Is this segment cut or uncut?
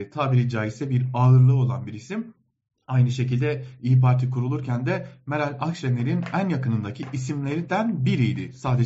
uncut